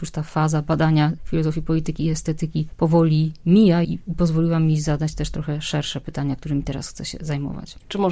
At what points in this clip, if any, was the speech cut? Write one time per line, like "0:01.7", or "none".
0:03.8